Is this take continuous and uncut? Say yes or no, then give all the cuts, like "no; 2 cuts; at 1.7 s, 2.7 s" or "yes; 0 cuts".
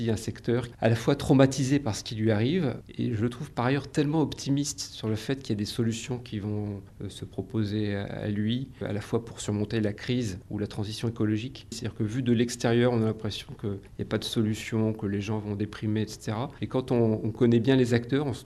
no; 1 cut; at 11.7 s